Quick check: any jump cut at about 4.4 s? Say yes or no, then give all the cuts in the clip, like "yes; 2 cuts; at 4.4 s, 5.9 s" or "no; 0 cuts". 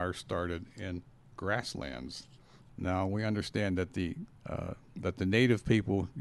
yes; 2 cuts; at 2.7 s, 4.4 s